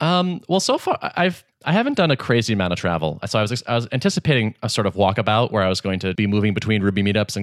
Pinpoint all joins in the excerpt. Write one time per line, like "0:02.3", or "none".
0:03.2
0:06.2

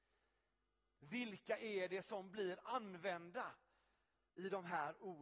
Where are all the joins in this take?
0:01.0

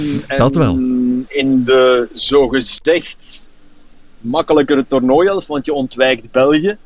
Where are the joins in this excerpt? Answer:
none

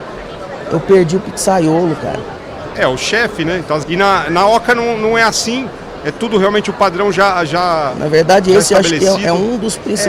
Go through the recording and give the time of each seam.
0:02.7
0:03.8

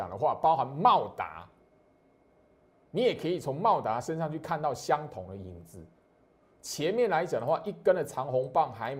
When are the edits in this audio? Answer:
none

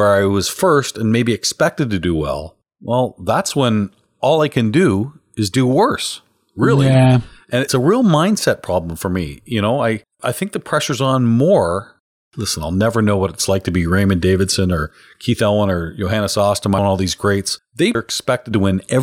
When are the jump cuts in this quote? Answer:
0:16.8
0:18.0

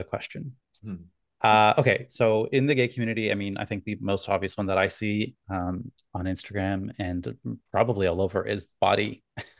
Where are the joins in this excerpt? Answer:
0:07.7

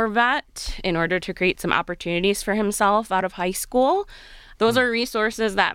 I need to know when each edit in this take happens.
0:04.5

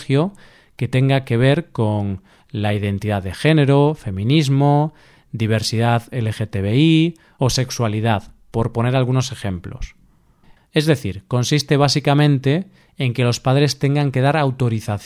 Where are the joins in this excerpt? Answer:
0:10.6

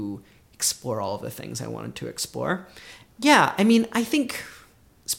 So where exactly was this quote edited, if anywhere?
0:03.1

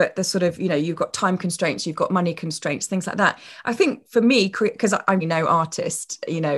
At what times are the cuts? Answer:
0:05.2

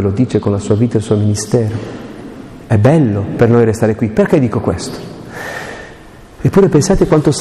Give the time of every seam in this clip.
0:06.4

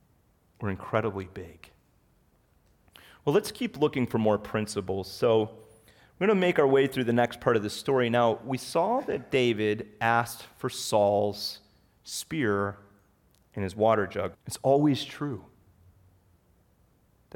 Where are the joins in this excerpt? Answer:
0:14.3

